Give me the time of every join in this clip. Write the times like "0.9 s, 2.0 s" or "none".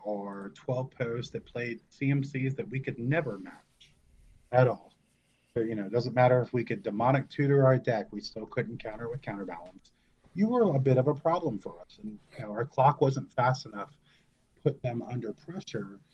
none